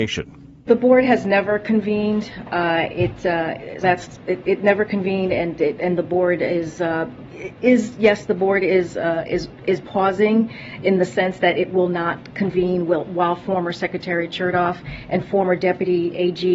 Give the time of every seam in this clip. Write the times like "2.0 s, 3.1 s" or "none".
3.8 s